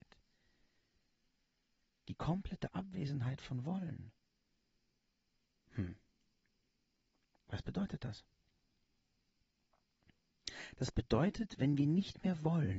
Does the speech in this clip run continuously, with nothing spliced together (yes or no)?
yes